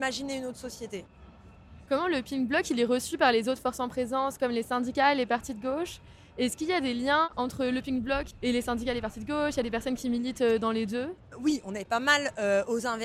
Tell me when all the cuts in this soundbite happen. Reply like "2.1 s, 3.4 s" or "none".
none